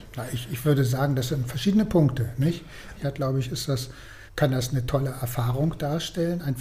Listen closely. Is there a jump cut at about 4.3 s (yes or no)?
yes